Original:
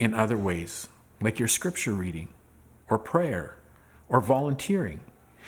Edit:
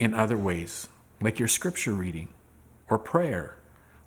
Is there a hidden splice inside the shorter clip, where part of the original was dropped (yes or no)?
no